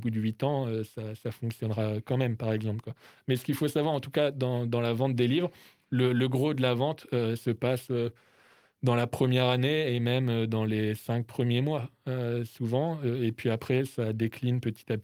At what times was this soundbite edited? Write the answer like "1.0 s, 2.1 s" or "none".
none